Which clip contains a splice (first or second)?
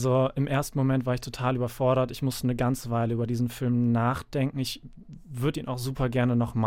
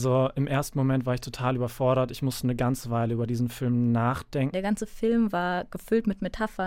second